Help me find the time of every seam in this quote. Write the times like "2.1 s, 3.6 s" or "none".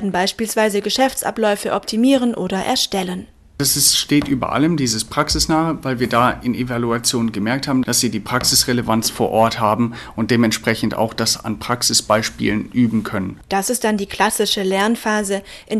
7.8 s, 13.4 s